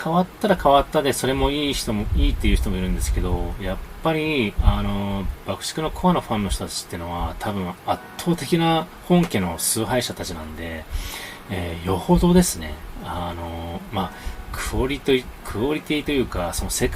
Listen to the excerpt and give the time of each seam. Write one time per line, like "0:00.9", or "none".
none